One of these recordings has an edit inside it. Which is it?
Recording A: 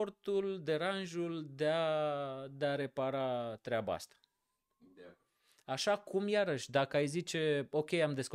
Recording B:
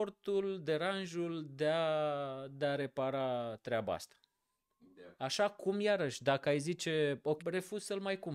B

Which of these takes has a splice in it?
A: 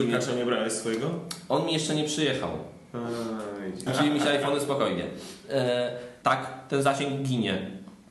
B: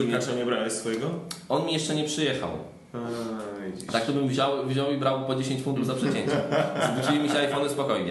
A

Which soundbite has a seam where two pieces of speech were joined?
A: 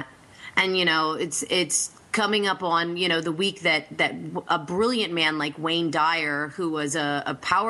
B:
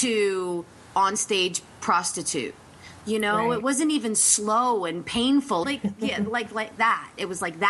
B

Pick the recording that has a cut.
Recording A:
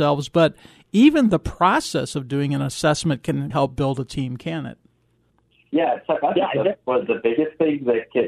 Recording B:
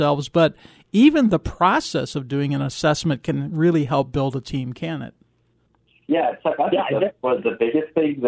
A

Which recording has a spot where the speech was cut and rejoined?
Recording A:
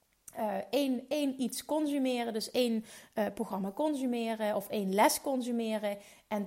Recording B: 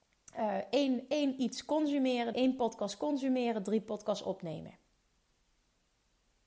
B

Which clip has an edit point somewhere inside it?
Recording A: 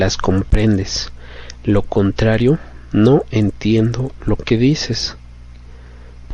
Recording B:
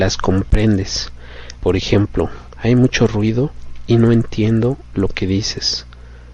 B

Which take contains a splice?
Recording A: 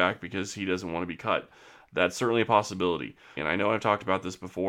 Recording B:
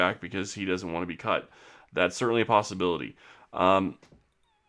A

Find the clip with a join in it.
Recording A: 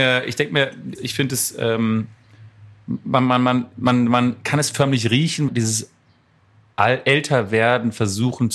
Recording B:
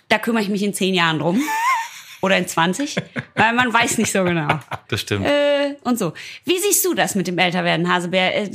A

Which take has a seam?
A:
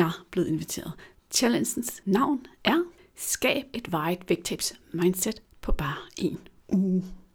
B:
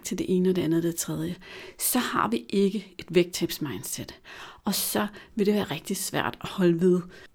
A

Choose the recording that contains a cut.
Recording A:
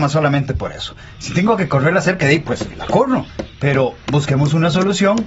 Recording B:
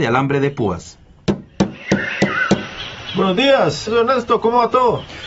B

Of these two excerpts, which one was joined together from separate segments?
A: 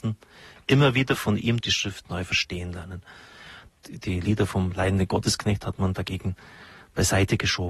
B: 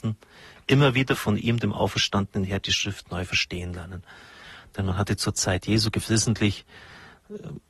A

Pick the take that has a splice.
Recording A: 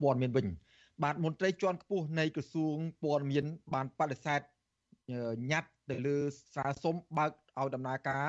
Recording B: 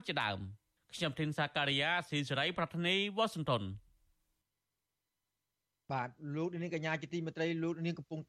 A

